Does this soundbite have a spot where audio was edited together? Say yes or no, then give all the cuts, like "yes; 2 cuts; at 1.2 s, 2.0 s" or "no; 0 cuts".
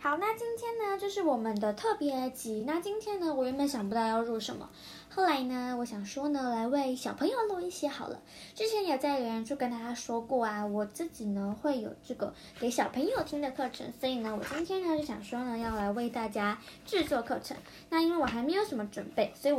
no; 0 cuts